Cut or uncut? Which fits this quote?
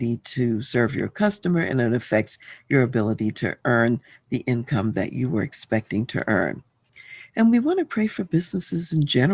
uncut